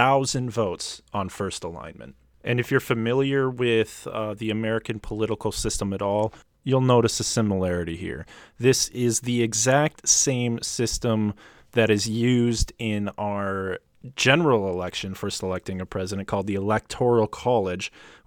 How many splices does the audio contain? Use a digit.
0